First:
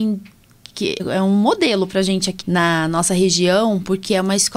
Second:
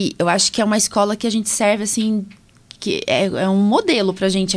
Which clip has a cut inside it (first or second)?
first